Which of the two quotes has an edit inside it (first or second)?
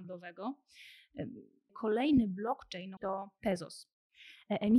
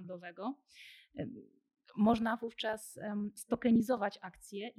first